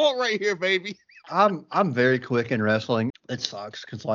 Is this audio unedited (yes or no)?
no